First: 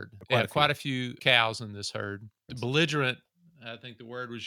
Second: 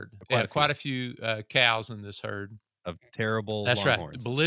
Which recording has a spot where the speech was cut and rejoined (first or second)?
first